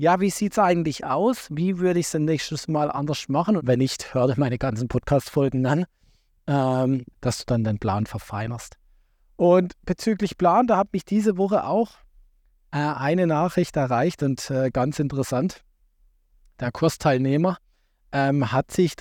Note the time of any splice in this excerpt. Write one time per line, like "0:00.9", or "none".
0:03.6
0:07.1